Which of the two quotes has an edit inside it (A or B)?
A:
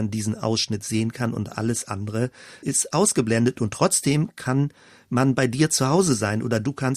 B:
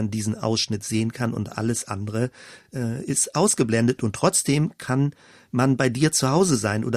A